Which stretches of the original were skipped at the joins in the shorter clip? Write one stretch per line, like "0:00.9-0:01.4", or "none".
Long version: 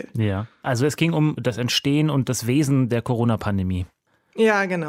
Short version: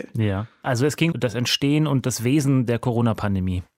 0:01.1-0:01.3